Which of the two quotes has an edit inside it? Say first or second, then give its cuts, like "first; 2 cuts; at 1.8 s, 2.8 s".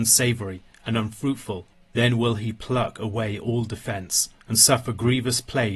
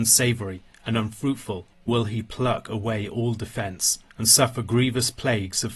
second; 1 cut; at 1.9 s